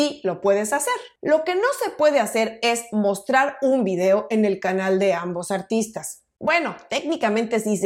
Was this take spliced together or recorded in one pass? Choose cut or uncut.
uncut